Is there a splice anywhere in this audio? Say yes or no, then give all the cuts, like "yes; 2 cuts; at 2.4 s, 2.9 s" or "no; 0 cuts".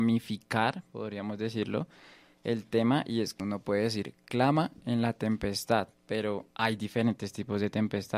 yes; 2 cuts; at 3.4 s, 6.5 s